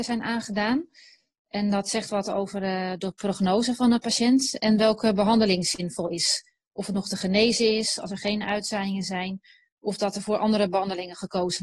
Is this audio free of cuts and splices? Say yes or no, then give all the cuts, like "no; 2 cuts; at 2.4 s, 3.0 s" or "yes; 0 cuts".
yes; 0 cuts